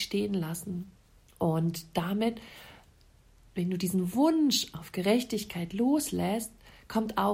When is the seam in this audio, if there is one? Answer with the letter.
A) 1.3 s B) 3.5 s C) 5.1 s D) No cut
A